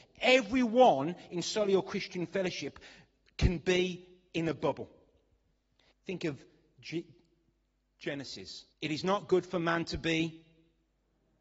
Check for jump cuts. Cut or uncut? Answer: cut